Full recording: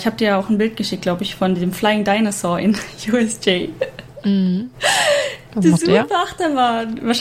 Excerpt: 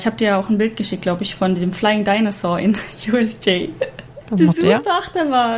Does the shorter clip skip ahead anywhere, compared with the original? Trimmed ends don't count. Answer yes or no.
yes